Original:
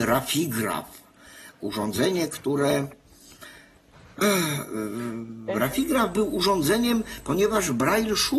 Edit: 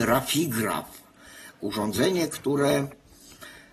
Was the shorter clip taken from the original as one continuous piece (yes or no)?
yes